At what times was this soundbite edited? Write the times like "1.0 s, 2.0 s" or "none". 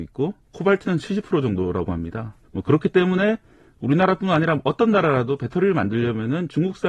2.4 s